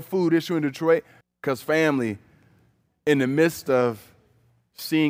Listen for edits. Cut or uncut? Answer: cut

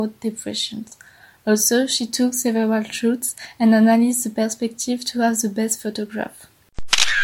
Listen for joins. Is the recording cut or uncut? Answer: uncut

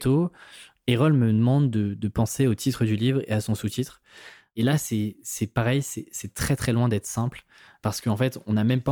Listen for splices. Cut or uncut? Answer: uncut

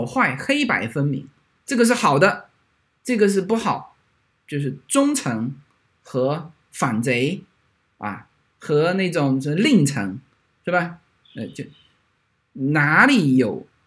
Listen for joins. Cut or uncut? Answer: uncut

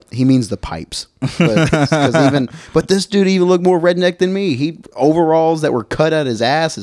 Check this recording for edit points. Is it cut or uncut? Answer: uncut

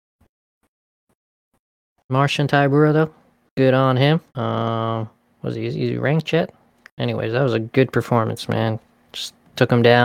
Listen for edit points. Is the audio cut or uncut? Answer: cut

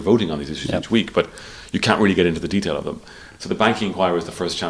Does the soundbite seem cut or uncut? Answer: uncut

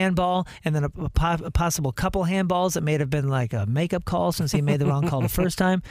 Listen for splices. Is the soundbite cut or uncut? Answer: uncut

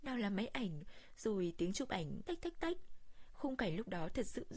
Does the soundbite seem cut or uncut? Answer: cut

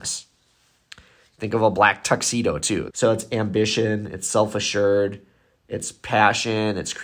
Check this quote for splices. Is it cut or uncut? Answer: cut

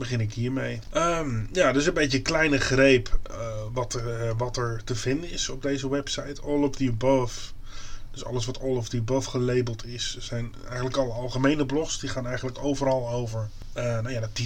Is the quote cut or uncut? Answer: uncut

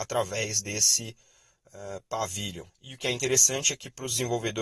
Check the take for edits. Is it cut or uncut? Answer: cut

